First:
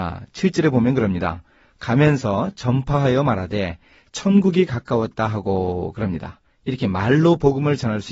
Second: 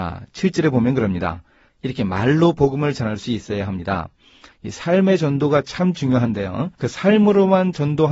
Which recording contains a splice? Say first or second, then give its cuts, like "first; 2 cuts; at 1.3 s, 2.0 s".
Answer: second; 3 cuts; at 1.7 s, 4.5 s, 6.7 s